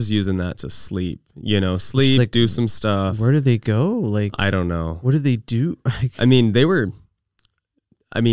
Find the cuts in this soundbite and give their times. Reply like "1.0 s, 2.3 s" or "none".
none